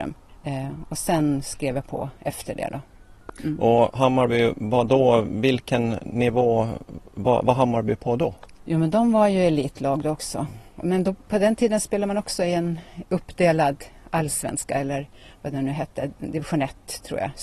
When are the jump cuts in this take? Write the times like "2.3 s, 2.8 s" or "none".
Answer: none